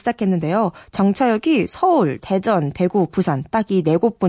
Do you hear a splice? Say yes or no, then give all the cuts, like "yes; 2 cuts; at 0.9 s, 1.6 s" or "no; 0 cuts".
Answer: no; 0 cuts